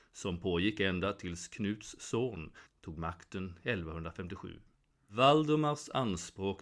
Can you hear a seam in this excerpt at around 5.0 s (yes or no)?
no